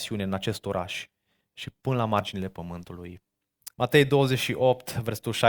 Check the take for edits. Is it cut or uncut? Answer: cut